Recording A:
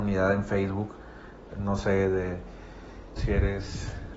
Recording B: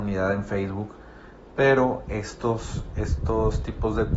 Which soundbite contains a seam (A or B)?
A